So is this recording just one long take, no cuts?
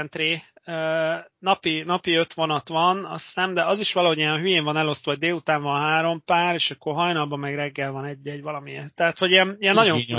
yes; 0 cuts

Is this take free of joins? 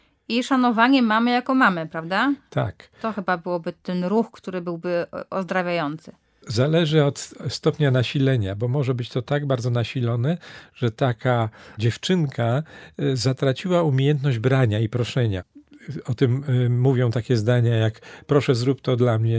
yes; 0 cuts

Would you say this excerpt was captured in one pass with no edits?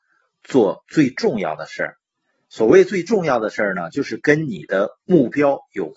yes; 0 cuts

